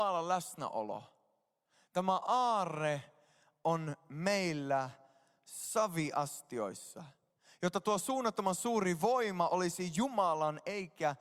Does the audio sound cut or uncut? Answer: uncut